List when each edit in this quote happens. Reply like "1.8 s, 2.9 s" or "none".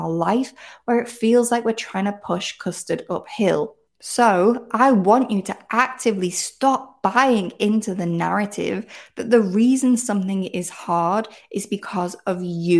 3.9 s